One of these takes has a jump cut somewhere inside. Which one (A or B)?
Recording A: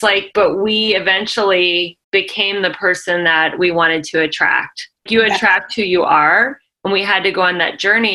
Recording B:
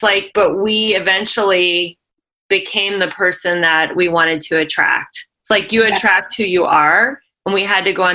A